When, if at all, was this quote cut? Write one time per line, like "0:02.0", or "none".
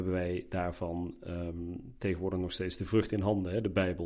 none